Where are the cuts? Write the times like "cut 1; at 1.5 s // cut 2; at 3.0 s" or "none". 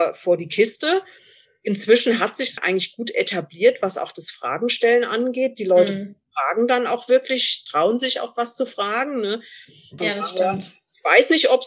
cut 1; at 2.6 s // cut 2; at 10.0 s